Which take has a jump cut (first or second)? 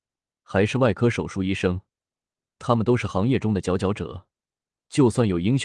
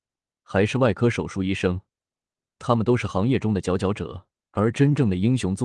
second